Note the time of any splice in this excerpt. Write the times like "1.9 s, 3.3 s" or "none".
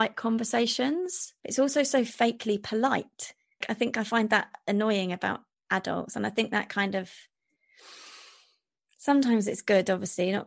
1.4 s, 3.6 s